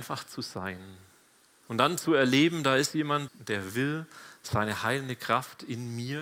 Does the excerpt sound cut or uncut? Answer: cut